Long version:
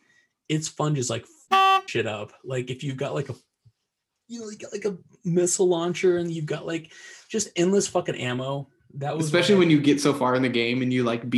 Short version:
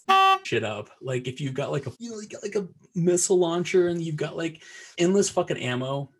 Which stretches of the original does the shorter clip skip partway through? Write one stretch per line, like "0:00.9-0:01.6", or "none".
0:03.4-0:04.2
0:07.2-0:07.5